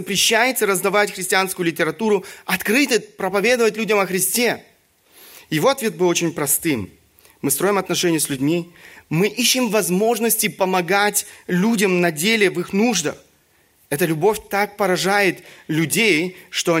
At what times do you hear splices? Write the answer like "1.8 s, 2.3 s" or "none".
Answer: none